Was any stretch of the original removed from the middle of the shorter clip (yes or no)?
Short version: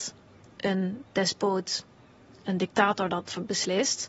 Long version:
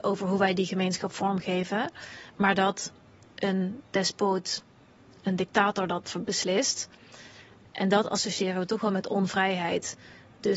no